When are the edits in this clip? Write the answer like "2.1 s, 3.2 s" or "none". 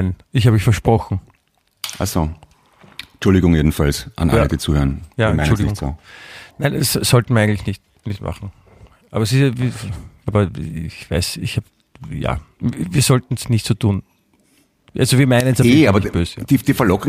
10.3 s, 13.4 s